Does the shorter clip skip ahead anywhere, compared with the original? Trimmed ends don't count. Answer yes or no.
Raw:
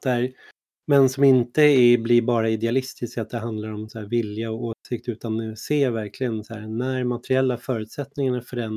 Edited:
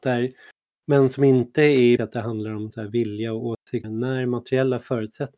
yes